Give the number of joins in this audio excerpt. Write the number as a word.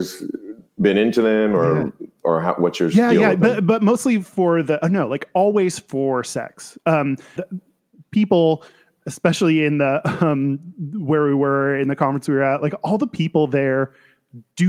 one